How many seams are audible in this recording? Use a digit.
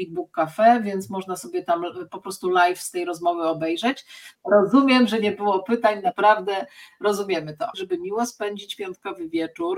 2